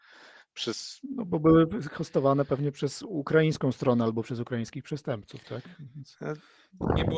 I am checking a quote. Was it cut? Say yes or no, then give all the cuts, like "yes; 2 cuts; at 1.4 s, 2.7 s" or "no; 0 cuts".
no; 0 cuts